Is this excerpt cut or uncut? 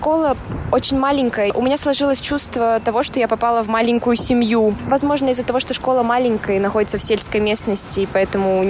cut